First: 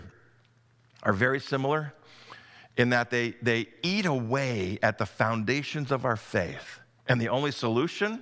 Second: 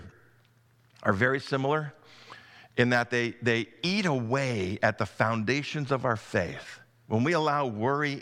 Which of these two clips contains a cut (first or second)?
first